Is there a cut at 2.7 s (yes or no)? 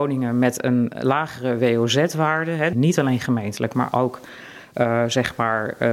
yes